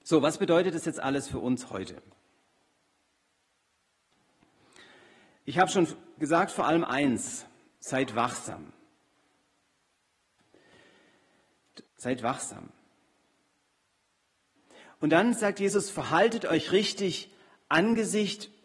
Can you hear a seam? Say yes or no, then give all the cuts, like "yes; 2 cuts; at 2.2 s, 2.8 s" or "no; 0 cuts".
yes; 1 cut; at 11.9 s